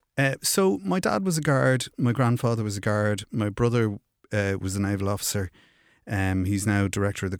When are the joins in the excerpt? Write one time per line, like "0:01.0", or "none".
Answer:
none